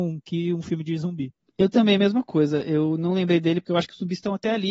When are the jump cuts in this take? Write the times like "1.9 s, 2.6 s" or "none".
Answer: none